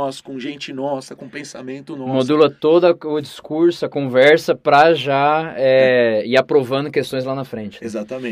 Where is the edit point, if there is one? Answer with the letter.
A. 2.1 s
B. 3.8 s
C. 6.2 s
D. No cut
D